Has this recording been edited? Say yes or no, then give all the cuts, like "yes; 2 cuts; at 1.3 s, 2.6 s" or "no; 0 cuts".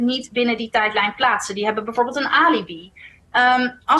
no; 0 cuts